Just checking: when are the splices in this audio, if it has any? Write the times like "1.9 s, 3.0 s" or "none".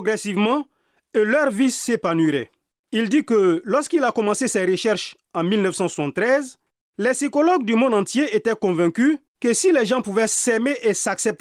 2.8 s, 9.3 s

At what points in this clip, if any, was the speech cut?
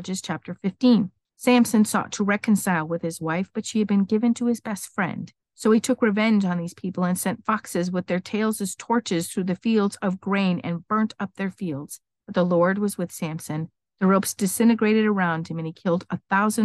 12.1 s

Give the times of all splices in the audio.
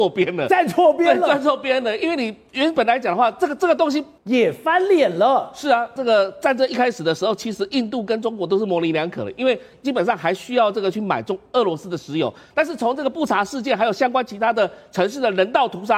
4.2 s, 6.0 s

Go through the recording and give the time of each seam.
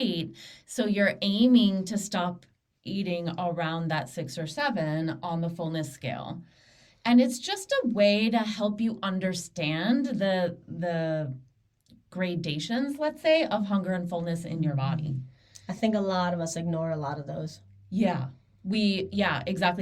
none

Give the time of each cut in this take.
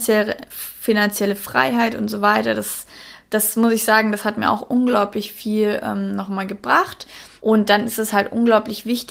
7.4 s

